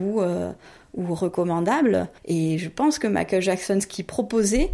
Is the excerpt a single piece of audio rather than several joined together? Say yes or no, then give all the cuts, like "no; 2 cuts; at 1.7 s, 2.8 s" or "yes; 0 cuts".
no; 1 cut; at 2.2 s